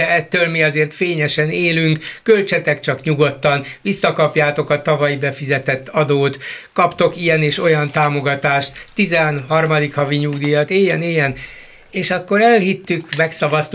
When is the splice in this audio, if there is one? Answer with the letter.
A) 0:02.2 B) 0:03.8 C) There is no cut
C